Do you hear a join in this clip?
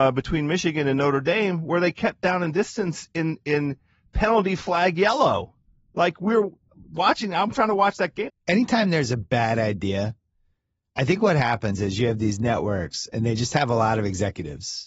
yes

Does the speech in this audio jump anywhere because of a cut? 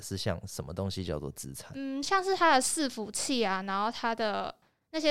no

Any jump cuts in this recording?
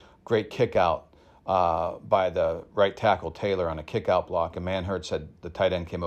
no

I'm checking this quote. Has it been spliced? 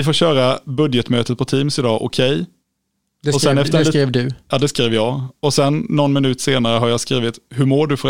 no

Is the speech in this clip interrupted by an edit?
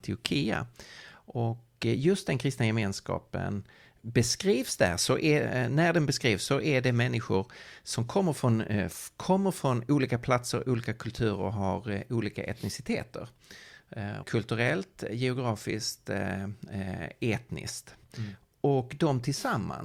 yes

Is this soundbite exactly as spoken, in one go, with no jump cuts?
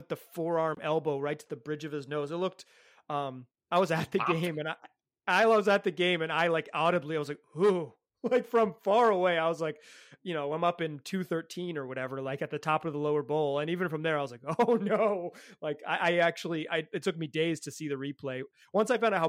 yes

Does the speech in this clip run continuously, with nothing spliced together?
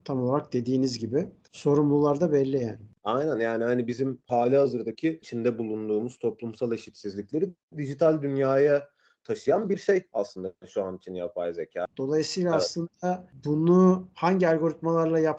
no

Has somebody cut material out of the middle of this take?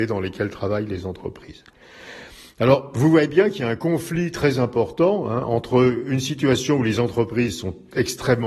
no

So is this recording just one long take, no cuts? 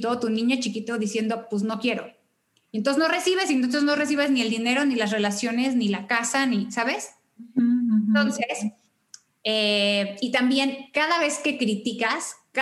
yes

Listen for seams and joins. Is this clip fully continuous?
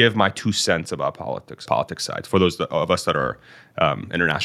no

